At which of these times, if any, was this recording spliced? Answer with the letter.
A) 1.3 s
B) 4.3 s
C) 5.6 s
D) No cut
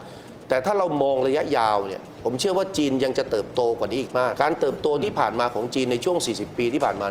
B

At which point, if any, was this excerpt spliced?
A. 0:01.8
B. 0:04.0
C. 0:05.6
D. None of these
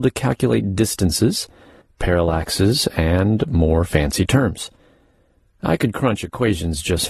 A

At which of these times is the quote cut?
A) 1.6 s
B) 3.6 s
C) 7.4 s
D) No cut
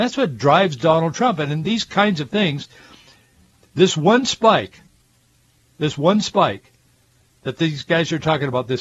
A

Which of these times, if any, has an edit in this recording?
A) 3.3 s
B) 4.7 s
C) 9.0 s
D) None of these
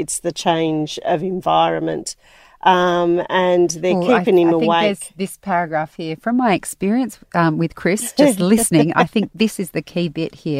D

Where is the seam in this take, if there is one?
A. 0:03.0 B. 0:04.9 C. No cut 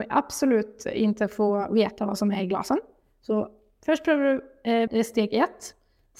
B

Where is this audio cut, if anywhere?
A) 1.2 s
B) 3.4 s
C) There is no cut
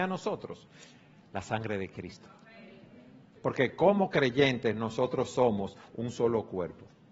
B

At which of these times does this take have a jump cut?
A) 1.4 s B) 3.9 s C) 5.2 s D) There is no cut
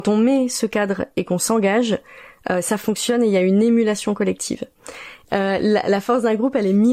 C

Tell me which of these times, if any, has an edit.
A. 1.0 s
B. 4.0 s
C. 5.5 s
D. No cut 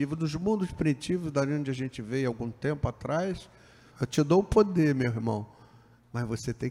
B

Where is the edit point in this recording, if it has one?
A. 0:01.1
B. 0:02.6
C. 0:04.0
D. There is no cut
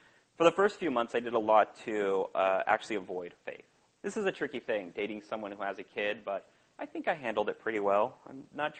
C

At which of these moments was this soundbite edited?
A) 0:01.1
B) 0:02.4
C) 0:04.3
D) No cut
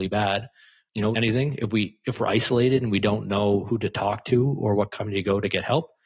A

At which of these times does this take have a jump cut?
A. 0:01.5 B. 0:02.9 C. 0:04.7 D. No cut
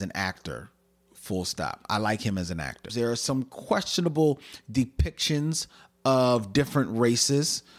B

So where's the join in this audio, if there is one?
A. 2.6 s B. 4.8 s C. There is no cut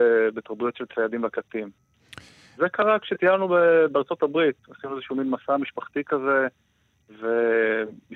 A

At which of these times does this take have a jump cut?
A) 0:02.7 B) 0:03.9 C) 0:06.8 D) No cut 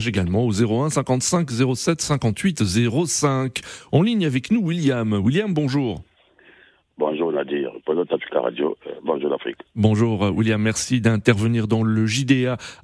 B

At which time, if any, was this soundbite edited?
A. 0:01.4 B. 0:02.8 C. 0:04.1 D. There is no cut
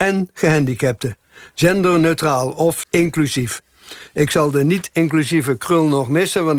B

